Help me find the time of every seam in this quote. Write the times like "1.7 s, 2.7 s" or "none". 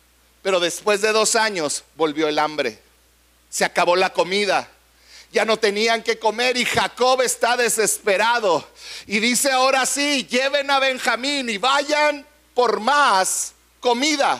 none